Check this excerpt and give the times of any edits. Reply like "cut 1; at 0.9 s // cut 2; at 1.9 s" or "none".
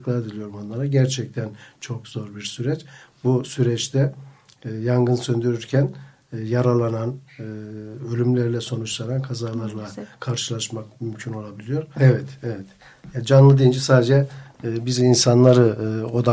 cut 1; at 12.0 s